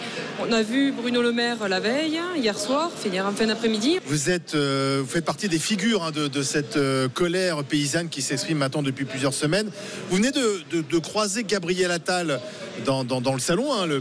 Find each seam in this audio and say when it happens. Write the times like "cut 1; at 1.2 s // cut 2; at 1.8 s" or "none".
cut 1; at 4.0 s